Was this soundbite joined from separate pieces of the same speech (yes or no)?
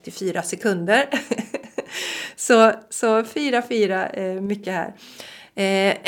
no